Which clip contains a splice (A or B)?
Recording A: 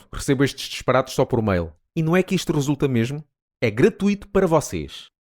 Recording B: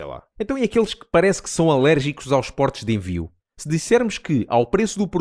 A